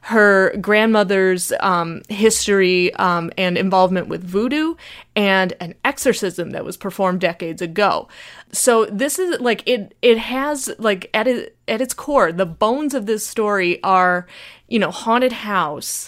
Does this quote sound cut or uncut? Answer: uncut